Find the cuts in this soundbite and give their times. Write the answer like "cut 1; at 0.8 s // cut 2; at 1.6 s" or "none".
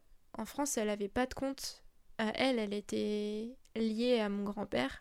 none